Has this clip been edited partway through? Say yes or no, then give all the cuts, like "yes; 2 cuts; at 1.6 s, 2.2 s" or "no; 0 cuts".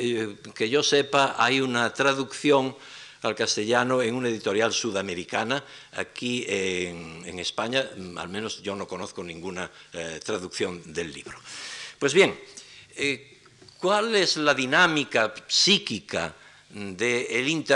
no; 0 cuts